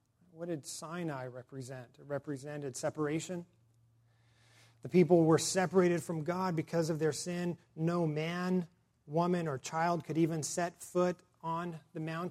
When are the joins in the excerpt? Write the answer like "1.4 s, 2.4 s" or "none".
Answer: none